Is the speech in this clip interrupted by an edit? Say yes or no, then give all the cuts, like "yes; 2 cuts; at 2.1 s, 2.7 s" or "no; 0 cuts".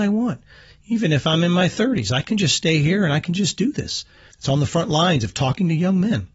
yes; 1 cut; at 4.3 s